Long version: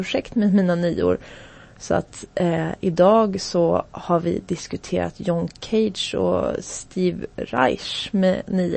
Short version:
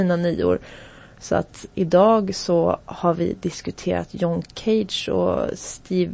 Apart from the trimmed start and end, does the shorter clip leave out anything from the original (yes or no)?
yes